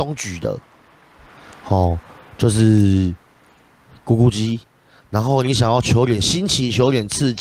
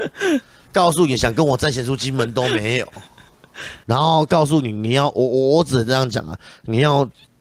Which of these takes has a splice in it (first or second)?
second